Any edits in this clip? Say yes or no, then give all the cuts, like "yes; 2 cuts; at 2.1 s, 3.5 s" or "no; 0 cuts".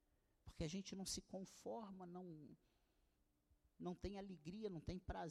no; 0 cuts